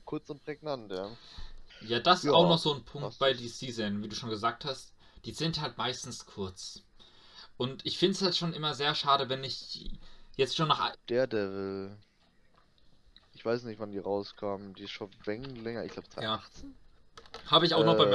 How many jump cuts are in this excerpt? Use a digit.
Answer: 2